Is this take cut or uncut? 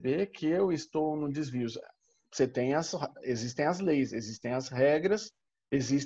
uncut